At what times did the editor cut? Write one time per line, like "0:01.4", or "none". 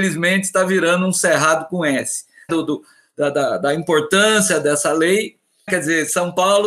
0:02.5
0:05.7